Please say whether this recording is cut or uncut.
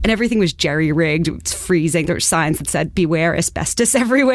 cut